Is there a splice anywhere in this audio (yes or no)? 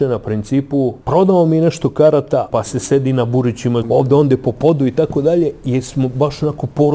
yes